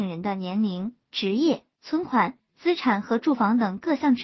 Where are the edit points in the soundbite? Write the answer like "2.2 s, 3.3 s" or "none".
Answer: none